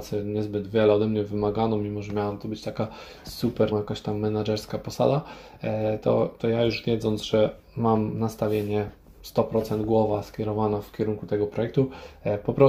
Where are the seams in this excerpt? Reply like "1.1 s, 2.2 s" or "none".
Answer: 3.7 s